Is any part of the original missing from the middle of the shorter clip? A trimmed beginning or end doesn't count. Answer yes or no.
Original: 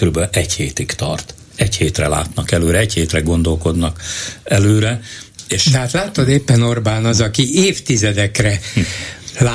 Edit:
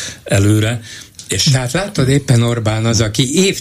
no